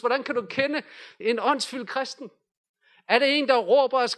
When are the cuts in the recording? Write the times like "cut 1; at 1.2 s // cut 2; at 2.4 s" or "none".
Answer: cut 1; at 1.2 s

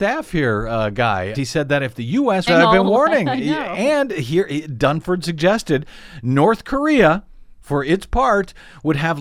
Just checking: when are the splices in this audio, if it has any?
cut 1; at 1.3 s // cut 2; at 2.5 s

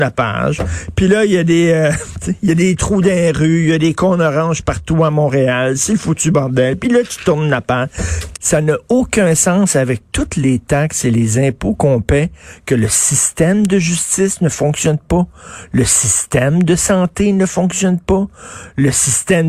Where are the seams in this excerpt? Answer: cut 1; at 8.3 s

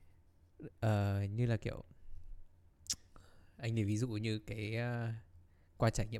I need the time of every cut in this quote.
none

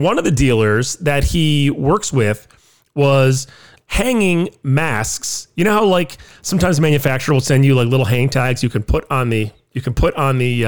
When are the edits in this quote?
cut 1; at 3.8 s

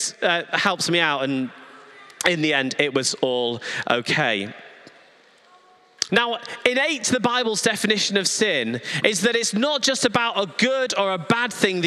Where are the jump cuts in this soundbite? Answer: cut 1; at 6.1 s

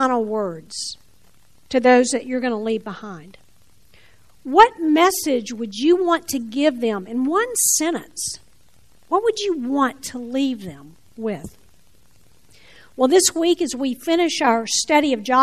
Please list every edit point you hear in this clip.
none

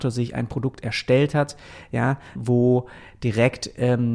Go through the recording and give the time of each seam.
cut 1; at 2.4 s

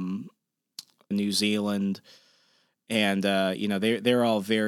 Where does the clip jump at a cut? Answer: cut 1; at 1.1 s

